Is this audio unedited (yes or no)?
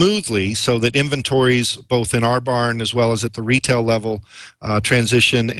yes